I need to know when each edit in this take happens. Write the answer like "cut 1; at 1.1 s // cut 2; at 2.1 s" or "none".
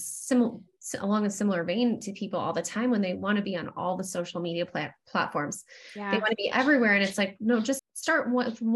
cut 1; at 7.8 s